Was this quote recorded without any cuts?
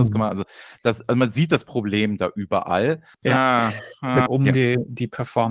no; 2 cuts; at 3.1 s, 4.3 s

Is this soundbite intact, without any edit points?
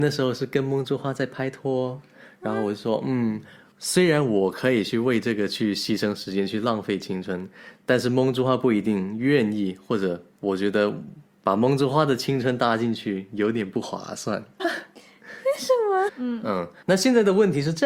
no; 2 cuts; at 14.6 s, 16.1 s

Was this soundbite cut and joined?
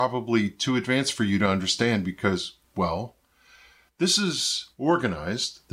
no; 0 cuts

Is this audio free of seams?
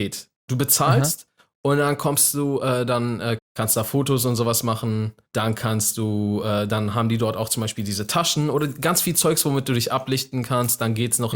no; 1 cut; at 3.4 s

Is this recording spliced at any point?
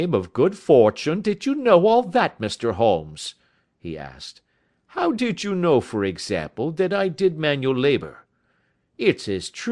no; 0 cuts

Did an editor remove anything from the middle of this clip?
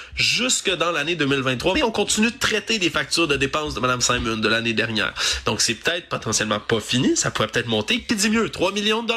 yes; 1 cut; at 1.7 s

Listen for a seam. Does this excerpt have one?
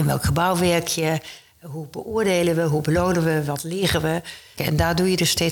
yes; 1 cut; at 4.6 s

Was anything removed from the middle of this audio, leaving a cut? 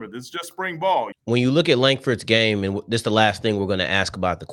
yes; 1 cut; at 1.1 s

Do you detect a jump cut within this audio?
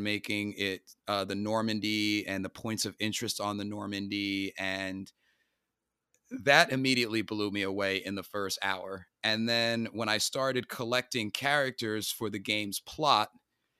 no; 0 cuts

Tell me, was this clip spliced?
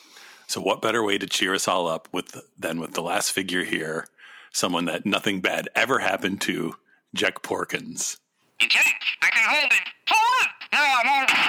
yes; 1 cut; at 8.5 s

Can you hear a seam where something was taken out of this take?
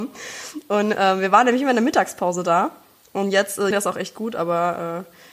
yes; 1 cut; at 3.7 s

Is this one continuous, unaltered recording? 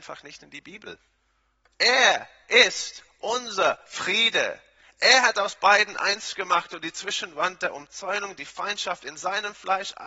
no; 1 cut; at 1.6 s

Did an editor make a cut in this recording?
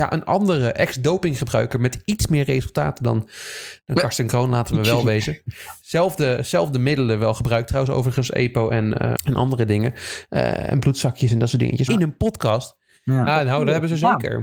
yes; 3 cuts; at 9.2 s, 11.9 s, 13.3 s

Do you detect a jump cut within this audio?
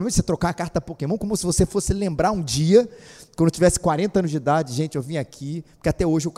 no; 0 cuts

